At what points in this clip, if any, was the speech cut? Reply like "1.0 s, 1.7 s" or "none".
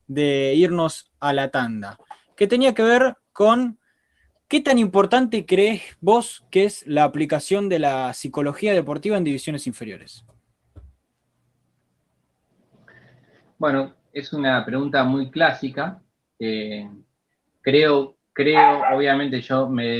14.1 s